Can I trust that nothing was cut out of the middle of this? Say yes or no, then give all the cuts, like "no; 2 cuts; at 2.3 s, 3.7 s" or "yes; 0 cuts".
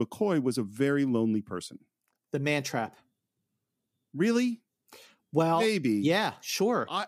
yes; 0 cuts